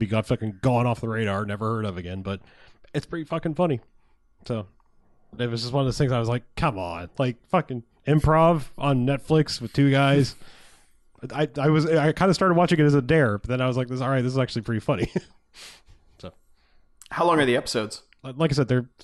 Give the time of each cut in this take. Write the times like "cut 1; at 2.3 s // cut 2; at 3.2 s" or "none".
cut 1; at 5.4 s